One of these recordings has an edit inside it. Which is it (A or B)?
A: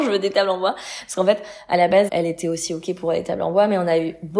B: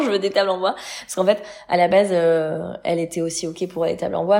A